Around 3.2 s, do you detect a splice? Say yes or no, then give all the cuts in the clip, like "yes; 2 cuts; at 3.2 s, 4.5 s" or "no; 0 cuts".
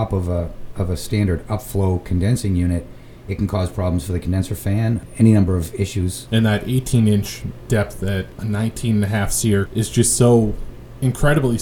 no; 2 cuts; at 6.3 s, 9.7 s